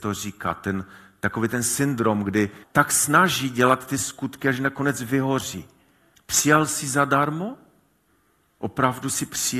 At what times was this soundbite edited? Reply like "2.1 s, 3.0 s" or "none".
2.6 s, 6.1 s